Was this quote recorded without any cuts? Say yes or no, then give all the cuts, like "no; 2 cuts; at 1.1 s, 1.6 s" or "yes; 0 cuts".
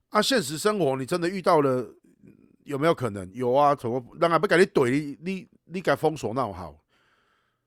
yes; 0 cuts